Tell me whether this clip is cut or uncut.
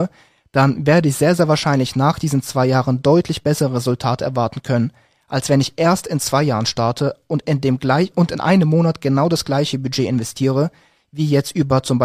cut